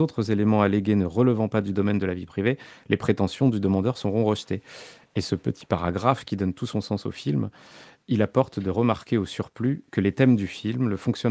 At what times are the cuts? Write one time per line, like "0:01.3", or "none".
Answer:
none